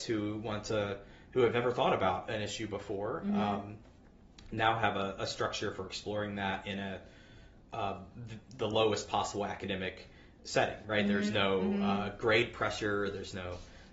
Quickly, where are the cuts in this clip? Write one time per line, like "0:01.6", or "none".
none